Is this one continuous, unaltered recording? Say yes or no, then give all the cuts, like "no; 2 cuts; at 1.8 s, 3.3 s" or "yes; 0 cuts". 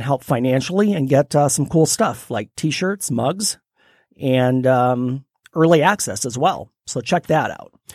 yes; 0 cuts